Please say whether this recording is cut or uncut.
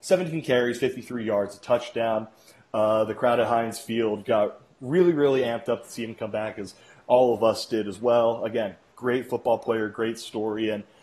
uncut